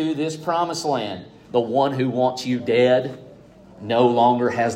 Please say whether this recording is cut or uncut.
cut